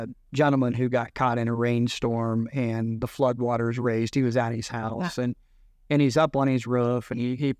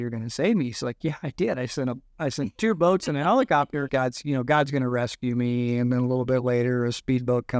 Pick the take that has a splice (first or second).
second